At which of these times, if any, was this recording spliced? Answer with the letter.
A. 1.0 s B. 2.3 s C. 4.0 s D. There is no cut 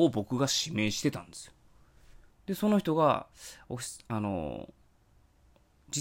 B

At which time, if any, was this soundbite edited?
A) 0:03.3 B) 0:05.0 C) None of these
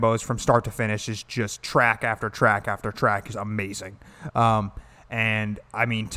A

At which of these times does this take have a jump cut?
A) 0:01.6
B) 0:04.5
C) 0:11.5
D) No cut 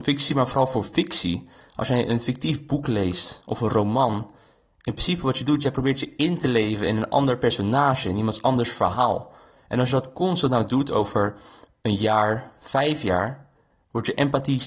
D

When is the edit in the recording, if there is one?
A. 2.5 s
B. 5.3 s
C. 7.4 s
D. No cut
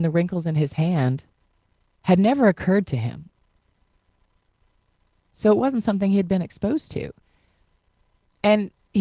B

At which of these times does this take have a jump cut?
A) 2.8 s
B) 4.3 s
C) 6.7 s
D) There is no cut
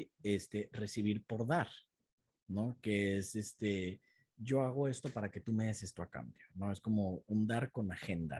D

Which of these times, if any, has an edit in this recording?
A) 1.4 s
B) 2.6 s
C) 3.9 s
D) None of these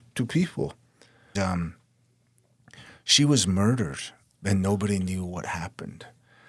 A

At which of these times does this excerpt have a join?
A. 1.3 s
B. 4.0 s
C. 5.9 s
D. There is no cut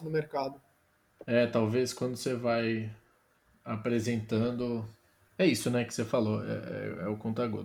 D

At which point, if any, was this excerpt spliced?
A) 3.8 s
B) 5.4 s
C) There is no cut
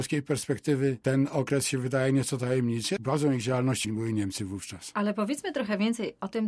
A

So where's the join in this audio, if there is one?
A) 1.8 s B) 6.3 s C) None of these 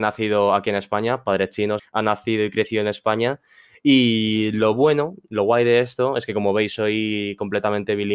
A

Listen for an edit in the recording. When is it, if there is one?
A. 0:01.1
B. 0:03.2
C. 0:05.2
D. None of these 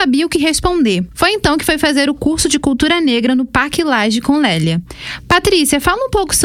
D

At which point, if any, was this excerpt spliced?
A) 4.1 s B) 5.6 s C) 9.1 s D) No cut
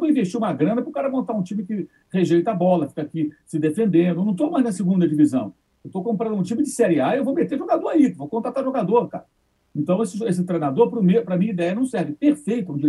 C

